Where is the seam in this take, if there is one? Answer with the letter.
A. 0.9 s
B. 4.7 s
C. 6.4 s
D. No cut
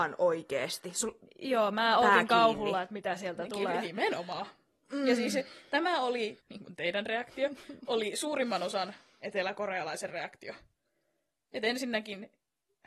C